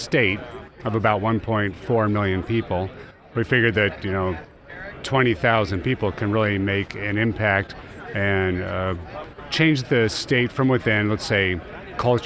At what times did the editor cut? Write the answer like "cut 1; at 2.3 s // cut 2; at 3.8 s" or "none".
none